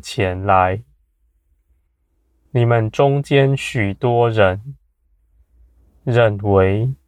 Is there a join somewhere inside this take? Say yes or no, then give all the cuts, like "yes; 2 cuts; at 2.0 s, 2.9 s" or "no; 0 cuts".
no; 0 cuts